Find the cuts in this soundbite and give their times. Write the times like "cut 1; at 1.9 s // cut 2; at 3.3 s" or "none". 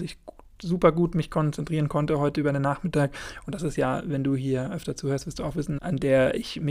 cut 1; at 5.8 s